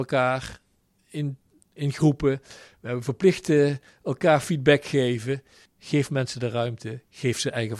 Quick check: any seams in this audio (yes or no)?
yes